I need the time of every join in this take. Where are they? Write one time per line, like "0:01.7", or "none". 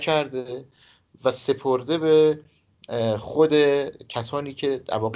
none